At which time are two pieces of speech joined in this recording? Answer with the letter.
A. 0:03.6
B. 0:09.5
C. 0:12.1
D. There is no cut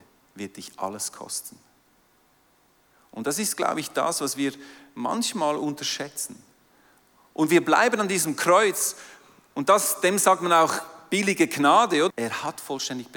C